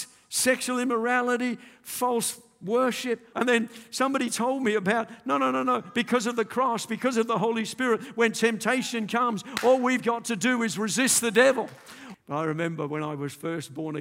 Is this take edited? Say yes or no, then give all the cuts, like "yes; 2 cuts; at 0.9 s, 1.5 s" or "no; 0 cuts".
yes; 2 cuts; at 3.3 s, 12.1 s